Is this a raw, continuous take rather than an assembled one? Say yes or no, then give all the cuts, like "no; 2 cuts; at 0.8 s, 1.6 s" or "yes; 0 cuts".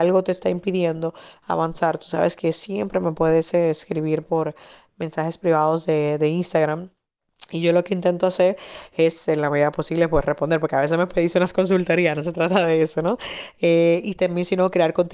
yes; 0 cuts